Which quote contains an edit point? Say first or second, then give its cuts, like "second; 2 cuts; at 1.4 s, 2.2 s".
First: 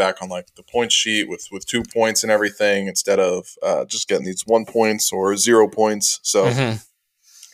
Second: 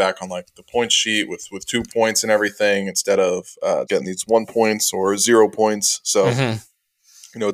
second; 1 cut; at 3.9 s